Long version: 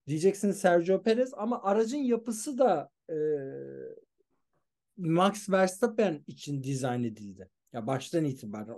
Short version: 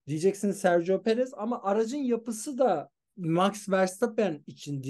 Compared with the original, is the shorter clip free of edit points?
no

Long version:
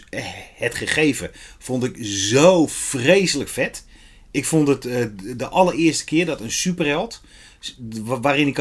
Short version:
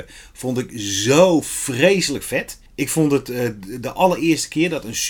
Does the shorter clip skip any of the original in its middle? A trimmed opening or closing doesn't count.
yes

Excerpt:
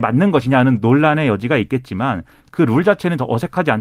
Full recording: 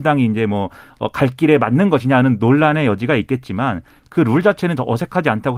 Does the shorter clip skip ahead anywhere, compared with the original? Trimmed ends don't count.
no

